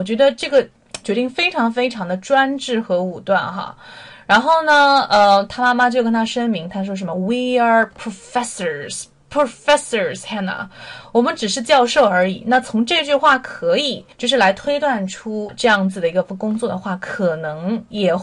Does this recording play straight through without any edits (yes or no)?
no